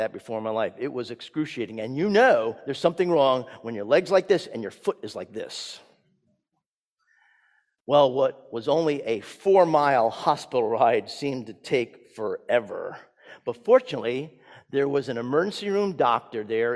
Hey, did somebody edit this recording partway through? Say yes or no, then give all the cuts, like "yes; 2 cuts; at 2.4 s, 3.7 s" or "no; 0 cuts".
no; 0 cuts